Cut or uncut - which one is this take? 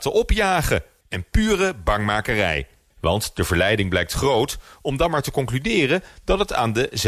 cut